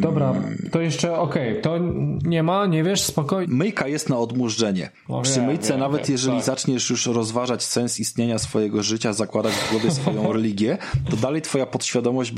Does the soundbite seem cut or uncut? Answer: cut